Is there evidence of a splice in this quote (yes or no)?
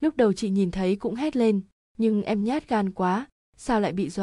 no